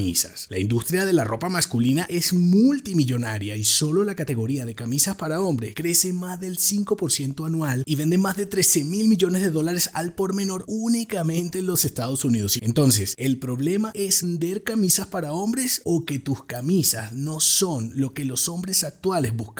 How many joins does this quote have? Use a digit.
2